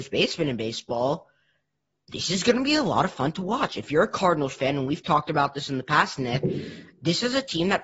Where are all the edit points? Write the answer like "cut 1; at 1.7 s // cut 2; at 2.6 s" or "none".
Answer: none